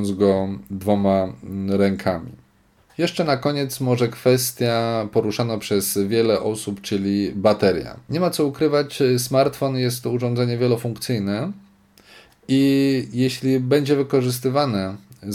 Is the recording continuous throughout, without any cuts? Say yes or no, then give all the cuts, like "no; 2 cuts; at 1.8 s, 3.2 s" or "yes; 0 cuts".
yes; 0 cuts